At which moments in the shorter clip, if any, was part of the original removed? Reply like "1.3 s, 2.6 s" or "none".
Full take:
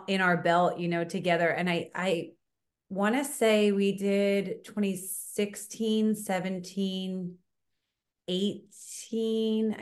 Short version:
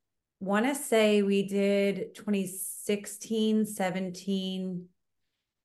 none